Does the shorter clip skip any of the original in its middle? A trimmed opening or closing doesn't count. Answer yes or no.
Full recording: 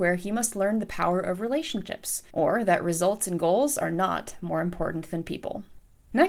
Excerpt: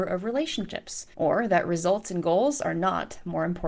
no